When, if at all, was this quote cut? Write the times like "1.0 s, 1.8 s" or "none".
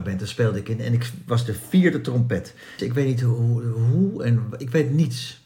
2.8 s